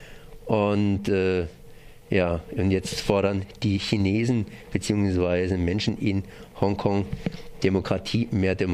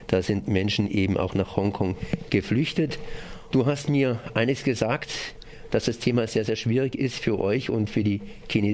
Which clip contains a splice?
second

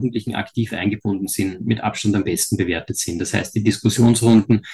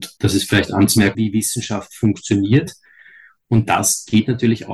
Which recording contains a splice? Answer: second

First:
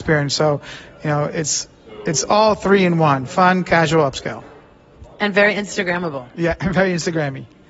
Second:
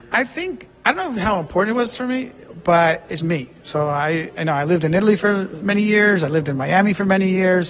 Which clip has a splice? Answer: second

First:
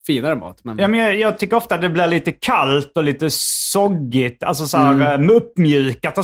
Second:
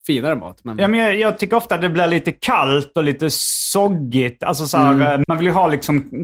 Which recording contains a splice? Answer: second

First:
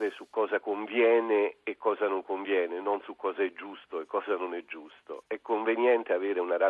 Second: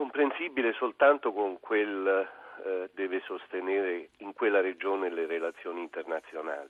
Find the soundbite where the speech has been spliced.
second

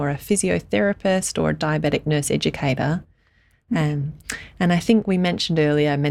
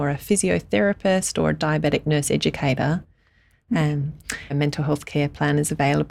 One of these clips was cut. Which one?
second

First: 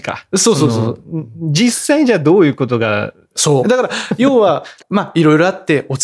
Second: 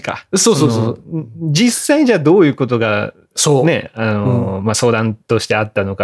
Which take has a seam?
first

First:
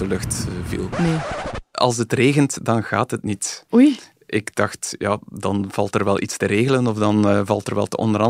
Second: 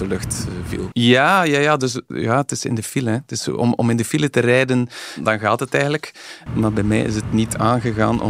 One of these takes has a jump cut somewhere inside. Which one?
second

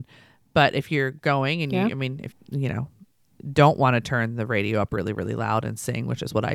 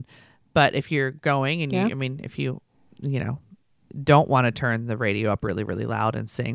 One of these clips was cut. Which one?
first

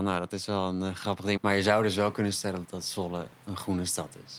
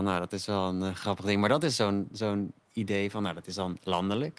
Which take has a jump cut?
first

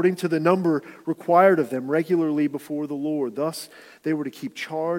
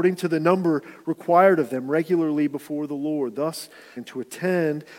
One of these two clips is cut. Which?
second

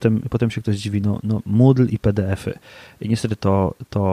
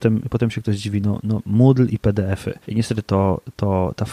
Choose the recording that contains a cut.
second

